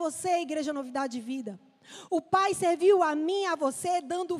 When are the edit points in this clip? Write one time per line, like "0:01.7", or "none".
0:02.1